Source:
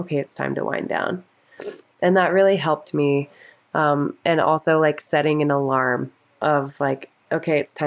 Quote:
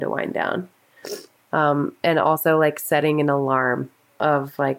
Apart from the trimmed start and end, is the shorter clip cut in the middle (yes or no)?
yes